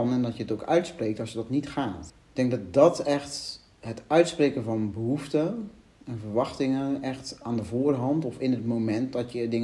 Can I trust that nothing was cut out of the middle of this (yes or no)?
no